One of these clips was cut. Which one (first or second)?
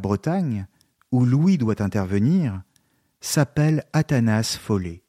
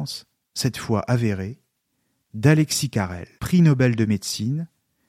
second